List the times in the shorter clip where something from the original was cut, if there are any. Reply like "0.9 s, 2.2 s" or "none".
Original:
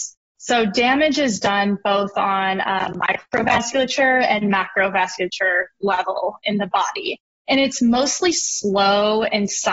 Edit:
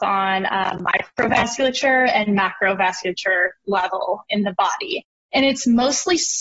none